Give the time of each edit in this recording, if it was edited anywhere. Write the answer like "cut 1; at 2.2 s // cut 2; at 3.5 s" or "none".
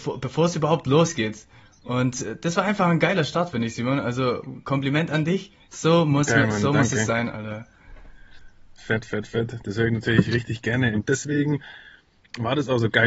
cut 1; at 10.9 s